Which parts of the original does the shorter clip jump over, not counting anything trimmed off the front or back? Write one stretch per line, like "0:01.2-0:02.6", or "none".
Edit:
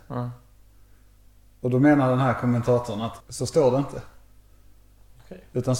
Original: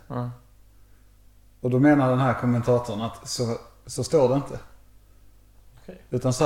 0:03.2-0:03.8

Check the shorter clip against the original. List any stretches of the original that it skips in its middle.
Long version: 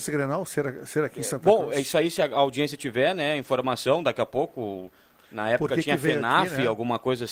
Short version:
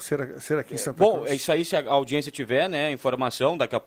none

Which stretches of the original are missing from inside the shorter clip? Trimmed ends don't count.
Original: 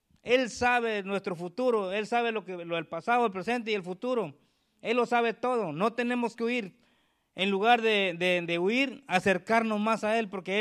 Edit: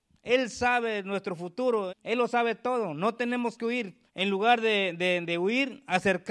0:01.9-0:04.7
0:06.9-0:07.3

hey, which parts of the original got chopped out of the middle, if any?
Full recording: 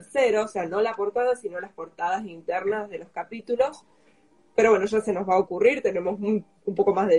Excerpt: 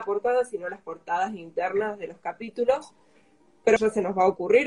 0:04.7-0:04.9

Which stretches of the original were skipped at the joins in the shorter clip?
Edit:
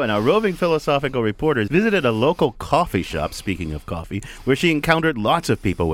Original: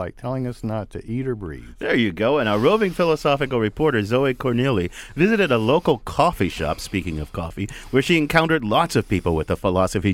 0:04.0-0:05.1

